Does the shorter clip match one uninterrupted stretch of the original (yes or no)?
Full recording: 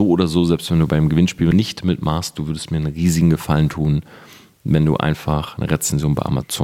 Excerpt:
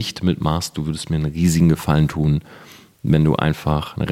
yes